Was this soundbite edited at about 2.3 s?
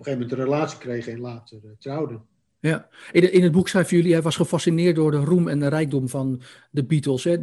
no; 0 cuts

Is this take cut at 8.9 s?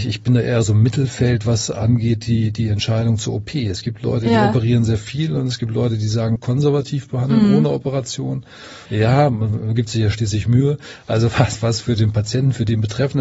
yes; 2 cuts; at 6.4 s, 8.9 s

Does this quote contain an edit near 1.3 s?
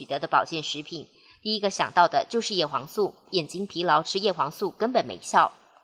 no; 1 cut; at 3.3 s

